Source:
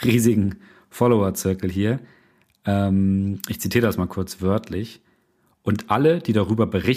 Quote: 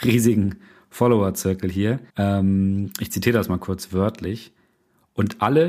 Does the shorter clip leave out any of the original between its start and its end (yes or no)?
yes